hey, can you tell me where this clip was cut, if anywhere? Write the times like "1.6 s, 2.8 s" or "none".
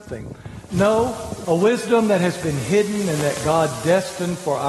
1.4 s